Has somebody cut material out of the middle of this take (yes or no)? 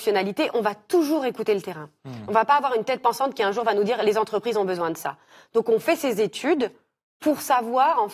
no